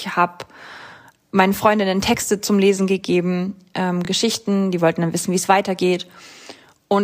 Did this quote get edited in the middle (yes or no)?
no